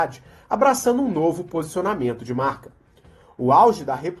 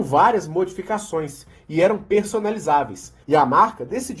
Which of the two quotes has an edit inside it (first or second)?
second